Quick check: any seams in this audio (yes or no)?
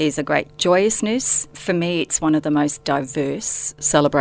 no